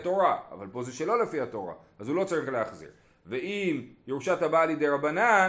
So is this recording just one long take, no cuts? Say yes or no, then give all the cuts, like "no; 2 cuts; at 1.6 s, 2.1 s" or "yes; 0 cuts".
yes; 0 cuts